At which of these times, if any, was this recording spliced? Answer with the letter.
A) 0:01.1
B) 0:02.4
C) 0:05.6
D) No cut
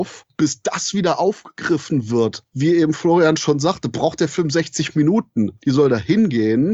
C